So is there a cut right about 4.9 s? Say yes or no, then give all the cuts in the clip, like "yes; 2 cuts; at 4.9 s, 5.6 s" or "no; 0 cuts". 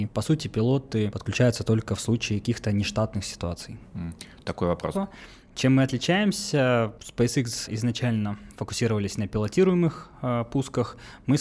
yes; 1 cut; at 4.9 s